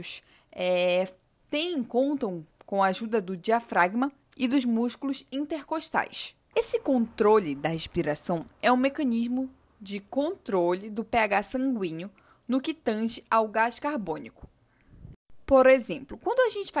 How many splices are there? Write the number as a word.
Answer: one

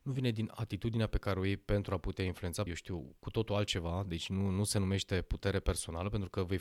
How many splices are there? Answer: one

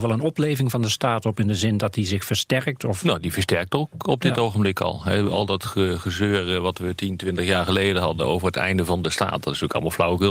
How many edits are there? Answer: zero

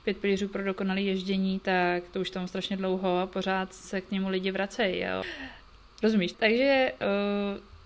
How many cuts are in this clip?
two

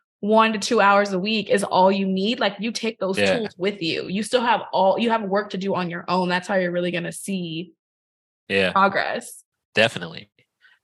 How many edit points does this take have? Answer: zero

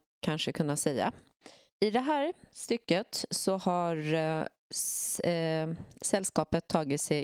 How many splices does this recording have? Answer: zero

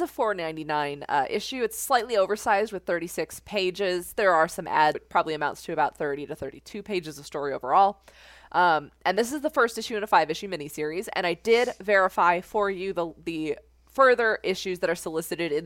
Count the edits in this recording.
one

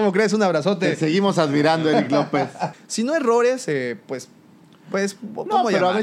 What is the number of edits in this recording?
one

